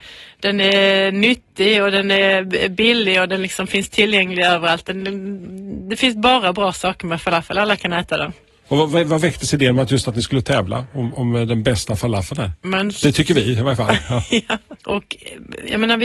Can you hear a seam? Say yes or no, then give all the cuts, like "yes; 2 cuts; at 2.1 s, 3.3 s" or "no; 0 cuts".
yes; 3 cuts; at 11.1 s, 12.6 s, 14.8 s